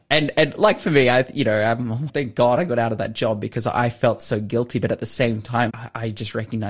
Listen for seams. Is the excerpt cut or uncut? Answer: cut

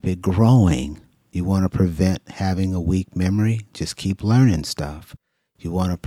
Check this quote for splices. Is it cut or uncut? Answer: uncut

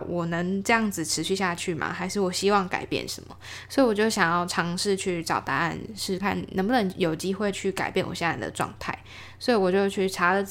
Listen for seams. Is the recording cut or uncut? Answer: cut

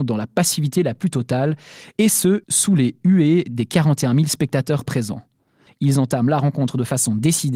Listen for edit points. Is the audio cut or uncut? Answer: cut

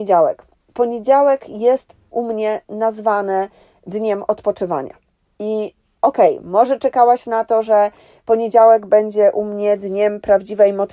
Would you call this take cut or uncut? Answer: uncut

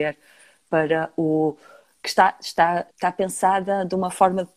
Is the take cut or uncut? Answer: cut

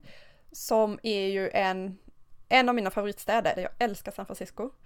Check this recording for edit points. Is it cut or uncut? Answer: cut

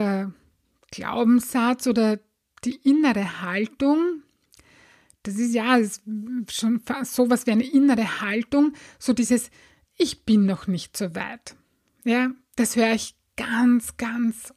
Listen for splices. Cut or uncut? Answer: uncut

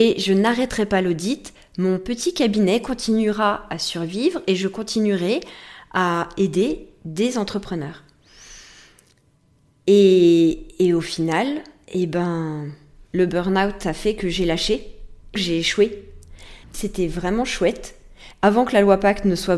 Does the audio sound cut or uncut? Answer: cut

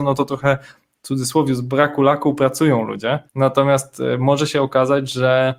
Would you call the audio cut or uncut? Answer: cut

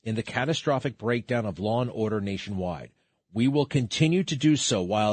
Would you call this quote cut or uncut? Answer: uncut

